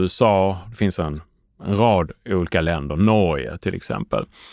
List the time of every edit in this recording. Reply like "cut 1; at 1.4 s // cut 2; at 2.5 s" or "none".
none